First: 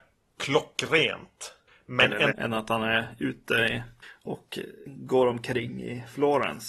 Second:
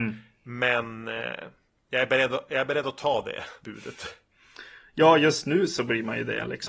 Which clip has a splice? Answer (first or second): first